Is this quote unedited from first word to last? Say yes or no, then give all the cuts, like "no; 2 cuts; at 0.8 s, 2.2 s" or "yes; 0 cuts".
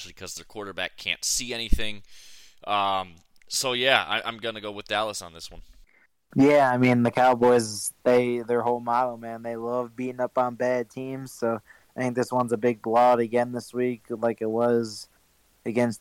yes; 0 cuts